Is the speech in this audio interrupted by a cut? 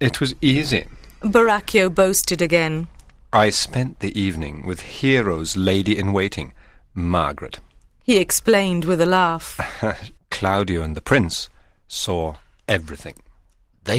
yes; 1 cut; at 10.2 s

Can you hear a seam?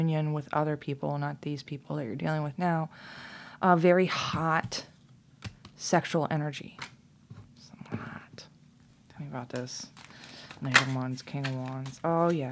no; 0 cuts

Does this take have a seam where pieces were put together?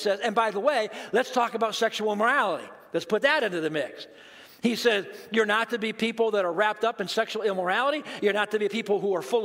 no; 0 cuts

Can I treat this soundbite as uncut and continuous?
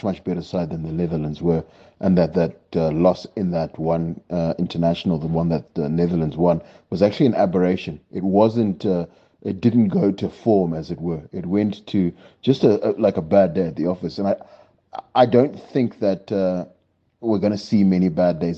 yes; 0 cuts

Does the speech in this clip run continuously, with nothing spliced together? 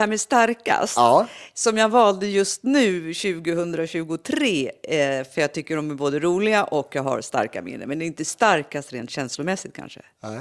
yes; 0 cuts

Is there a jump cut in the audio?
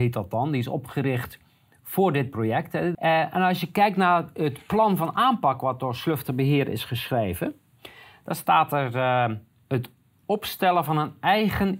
yes; 1 cut; at 2.9 s

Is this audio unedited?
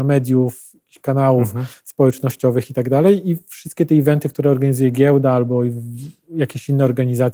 yes; 0 cuts

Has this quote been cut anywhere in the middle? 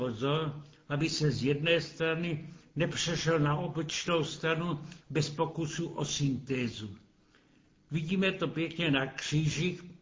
no; 0 cuts

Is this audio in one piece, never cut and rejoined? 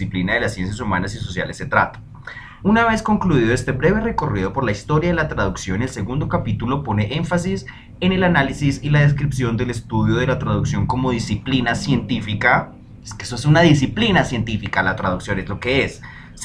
no; 1 cut; at 2.6 s

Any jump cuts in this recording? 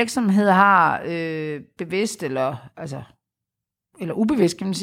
no; 0 cuts

